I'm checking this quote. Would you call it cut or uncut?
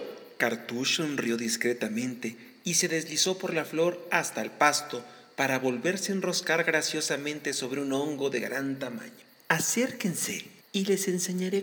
cut